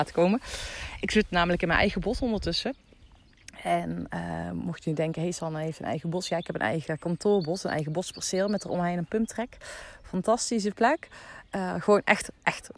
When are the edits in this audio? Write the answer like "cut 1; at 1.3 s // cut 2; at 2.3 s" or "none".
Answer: none

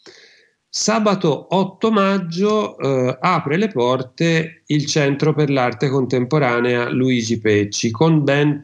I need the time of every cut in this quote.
none

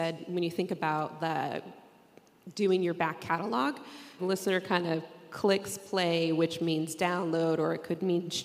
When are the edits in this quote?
cut 1; at 4.2 s

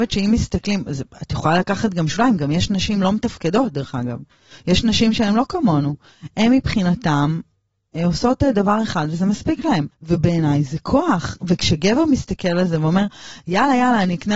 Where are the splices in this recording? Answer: cut 1; at 9.9 s

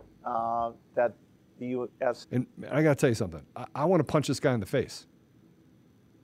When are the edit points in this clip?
cut 1; at 2.2 s

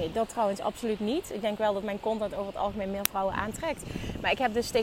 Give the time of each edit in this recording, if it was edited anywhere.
none

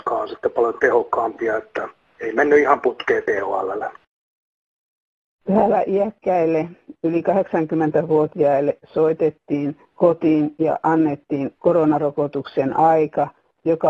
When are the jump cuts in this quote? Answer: none

